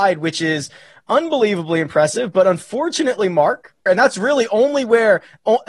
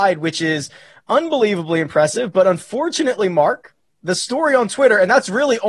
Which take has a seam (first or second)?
first